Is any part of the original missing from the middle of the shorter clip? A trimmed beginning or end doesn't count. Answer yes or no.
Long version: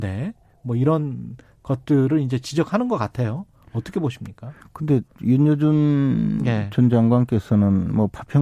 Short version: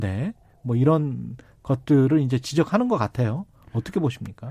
no